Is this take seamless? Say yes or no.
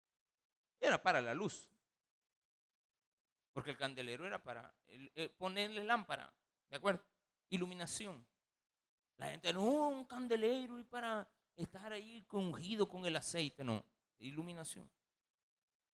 yes